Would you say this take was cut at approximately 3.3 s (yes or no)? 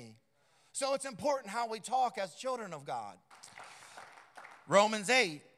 yes